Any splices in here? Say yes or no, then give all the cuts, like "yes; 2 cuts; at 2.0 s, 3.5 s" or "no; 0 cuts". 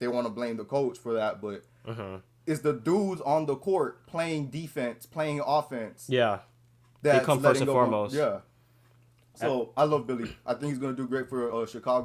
no; 0 cuts